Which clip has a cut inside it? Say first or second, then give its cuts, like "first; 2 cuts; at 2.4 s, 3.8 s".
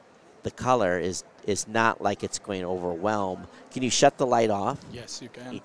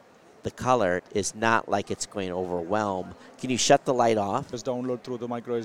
second; 2 cuts; at 1.0 s, 4.5 s